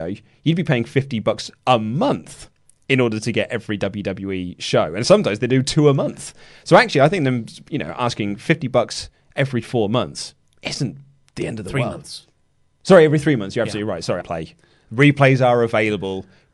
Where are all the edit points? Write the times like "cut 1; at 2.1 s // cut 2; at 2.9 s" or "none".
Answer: cut 1; at 14.2 s